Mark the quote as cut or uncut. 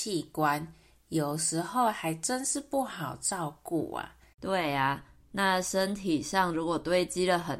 cut